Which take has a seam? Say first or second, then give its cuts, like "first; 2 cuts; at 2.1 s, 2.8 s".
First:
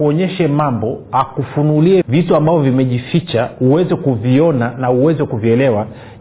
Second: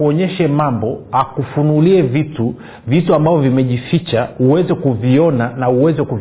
first; 1 cut; at 2.0 s